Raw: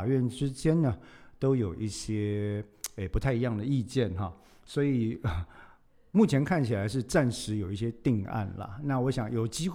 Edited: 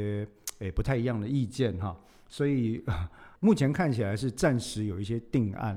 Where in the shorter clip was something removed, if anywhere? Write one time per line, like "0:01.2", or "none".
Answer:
0:03.4

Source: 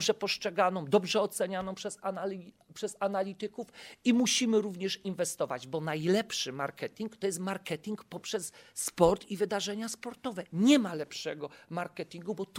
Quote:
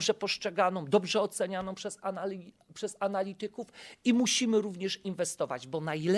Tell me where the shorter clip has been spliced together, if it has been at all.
none

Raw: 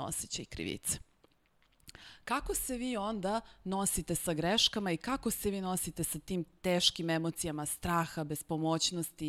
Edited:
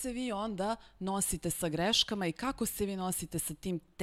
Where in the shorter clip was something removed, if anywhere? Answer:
none

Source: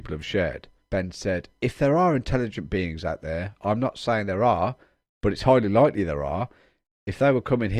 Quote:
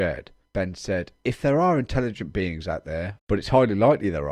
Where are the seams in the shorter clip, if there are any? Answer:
0:03.2

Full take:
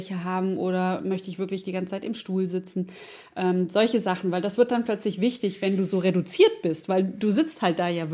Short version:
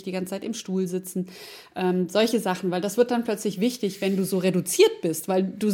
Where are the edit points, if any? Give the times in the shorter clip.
none

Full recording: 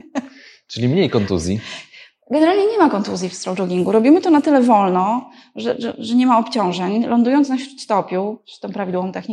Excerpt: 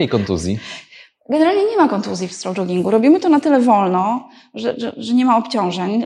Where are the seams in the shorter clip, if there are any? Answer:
none

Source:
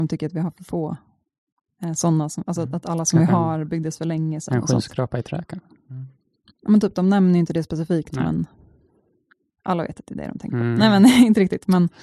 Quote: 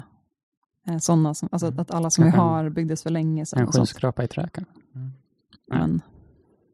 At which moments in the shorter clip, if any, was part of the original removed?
0:05.7

